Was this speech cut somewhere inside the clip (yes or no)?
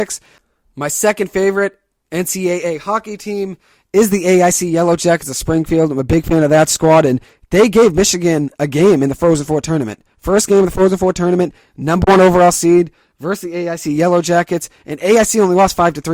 no